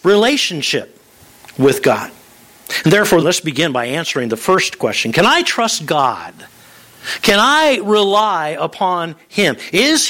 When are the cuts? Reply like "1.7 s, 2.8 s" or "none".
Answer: 3.2 s